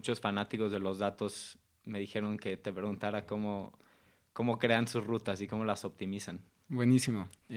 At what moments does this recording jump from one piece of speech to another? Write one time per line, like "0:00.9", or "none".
none